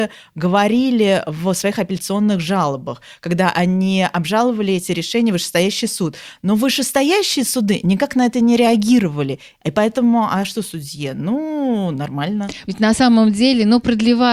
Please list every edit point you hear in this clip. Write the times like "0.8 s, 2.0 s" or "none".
12.6 s